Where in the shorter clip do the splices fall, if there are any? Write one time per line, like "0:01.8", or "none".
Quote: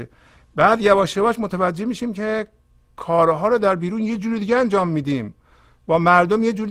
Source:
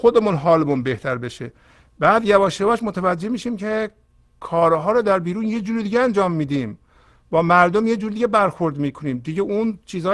none